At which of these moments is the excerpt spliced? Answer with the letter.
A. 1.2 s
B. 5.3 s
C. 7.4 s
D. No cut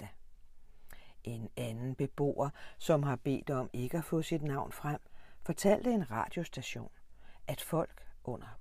D